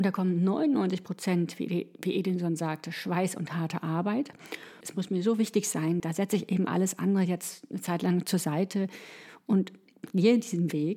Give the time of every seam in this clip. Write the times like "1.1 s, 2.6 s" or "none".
4.8 s, 6.0 s